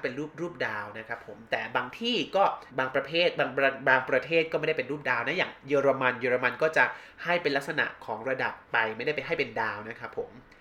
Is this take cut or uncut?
cut